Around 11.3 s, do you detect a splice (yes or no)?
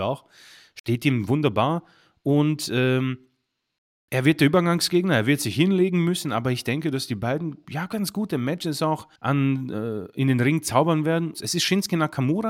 yes